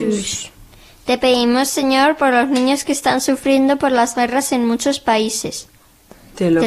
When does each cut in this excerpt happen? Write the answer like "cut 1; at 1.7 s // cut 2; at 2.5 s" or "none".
none